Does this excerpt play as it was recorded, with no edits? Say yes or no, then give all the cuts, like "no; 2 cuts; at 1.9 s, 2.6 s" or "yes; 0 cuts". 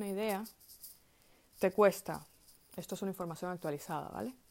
yes; 0 cuts